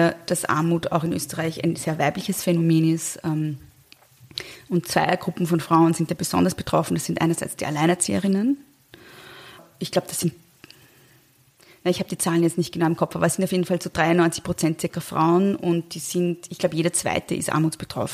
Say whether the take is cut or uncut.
uncut